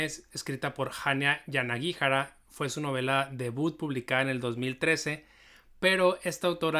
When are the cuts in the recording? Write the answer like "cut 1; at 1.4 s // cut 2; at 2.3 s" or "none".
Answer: none